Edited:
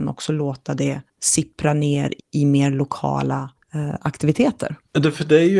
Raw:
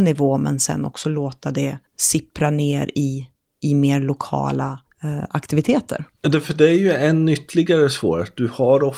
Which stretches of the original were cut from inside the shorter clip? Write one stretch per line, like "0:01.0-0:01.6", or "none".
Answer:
0:02.9-0:03.5